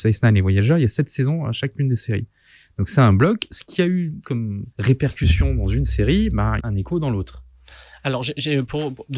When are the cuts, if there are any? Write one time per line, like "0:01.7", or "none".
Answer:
0:04.7
0:06.6

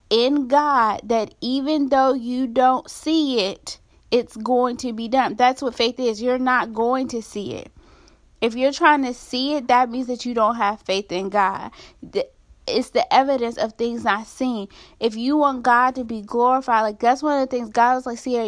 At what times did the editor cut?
none

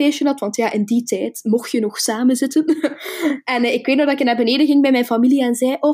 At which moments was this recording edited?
none

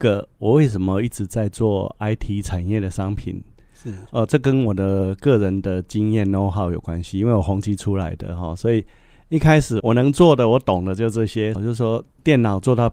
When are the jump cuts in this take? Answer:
0:09.8
0:11.5

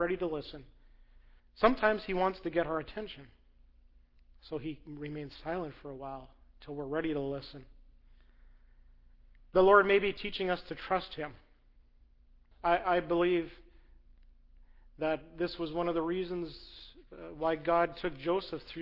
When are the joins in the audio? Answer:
0:01.4
0:12.5

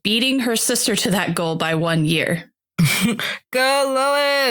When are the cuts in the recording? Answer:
none

